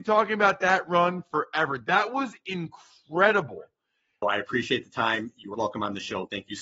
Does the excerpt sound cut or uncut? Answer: cut